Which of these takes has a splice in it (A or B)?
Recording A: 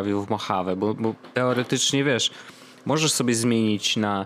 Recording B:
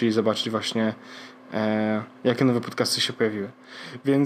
A